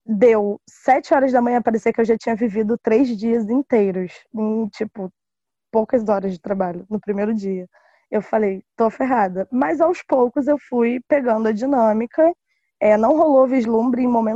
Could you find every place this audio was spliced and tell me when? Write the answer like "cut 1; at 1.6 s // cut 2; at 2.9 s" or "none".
none